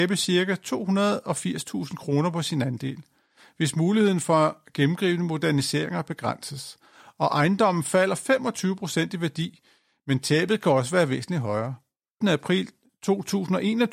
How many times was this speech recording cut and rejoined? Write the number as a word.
one